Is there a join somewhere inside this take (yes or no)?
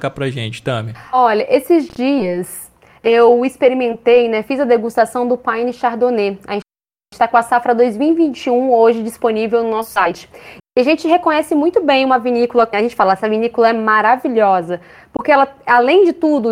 yes